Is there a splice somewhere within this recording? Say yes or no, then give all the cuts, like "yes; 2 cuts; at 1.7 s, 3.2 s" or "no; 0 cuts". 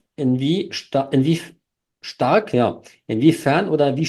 no; 0 cuts